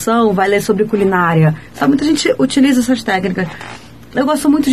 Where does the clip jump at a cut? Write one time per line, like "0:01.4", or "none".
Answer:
none